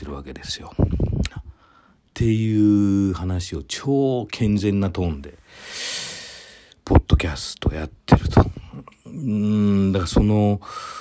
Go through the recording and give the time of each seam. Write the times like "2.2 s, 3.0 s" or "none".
1.3 s